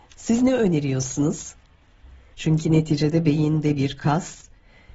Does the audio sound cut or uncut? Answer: cut